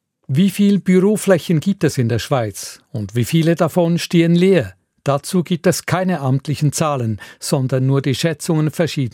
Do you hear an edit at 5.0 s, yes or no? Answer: no